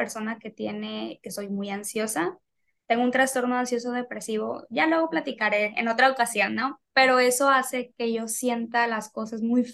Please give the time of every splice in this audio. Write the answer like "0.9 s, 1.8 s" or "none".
none